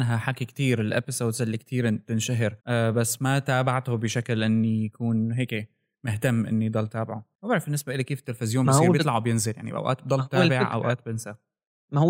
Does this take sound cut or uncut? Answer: cut